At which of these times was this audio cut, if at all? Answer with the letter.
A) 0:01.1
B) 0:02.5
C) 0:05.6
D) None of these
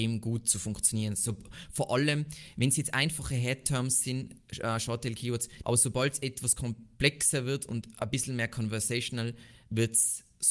C